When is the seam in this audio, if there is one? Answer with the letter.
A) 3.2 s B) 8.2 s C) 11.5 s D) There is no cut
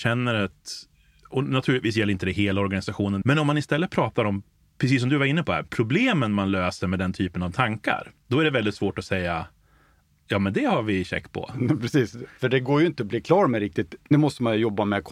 A